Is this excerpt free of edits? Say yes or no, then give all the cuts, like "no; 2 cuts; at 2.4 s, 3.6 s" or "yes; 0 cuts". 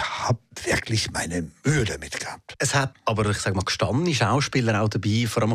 yes; 0 cuts